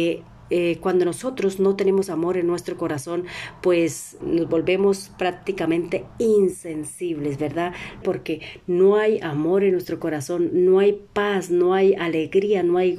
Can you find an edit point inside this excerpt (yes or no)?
yes